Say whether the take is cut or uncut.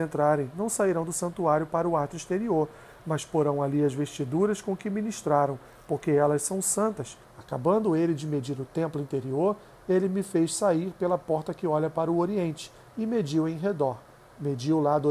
cut